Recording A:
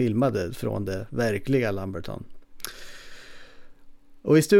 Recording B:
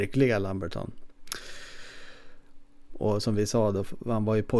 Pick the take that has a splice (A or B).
B